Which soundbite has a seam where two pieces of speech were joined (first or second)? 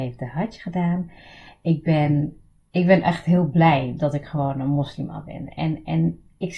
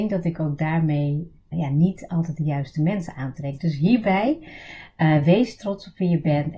second